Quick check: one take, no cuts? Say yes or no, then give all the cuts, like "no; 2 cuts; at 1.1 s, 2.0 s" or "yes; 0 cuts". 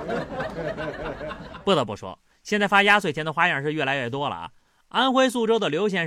yes; 0 cuts